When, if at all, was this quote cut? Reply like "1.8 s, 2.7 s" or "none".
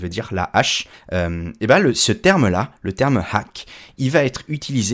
0.9 s